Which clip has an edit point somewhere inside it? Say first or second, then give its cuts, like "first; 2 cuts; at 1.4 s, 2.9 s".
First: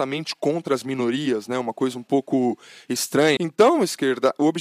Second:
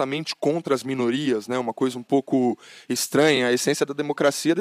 first; 1 cut; at 3.4 s